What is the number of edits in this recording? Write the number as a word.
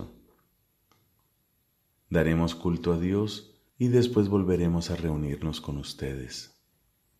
two